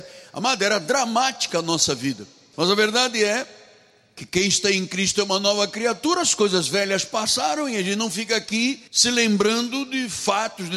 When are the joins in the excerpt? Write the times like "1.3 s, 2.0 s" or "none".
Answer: 2.5 s, 8.9 s